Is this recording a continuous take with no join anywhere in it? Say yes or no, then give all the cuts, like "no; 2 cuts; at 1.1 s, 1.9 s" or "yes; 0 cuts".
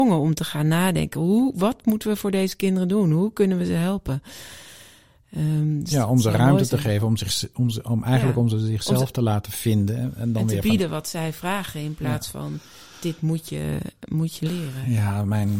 yes; 0 cuts